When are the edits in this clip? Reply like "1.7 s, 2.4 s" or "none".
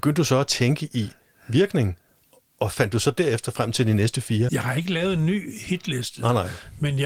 4.5 s